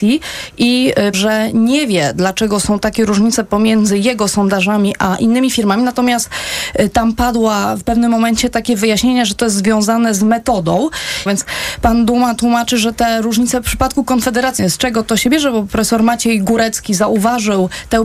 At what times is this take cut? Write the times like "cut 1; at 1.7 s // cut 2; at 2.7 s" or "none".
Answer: cut 1; at 1.1 s // cut 2; at 11.3 s // cut 3; at 14.6 s